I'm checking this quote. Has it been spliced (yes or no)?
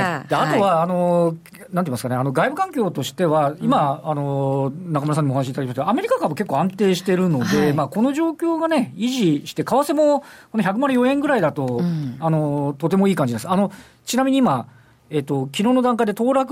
no